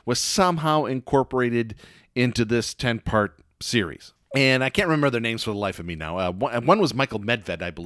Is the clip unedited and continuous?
no; 1 cut; at 4.2 s

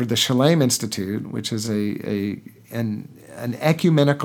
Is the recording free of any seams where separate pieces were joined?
yes; 0 cuts

